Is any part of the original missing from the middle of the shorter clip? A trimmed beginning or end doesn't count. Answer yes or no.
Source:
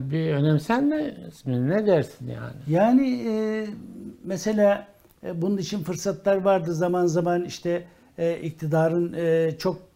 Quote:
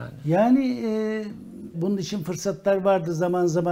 yes